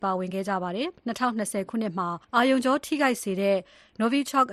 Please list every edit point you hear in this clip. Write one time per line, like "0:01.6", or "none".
0:01.0
0:02.2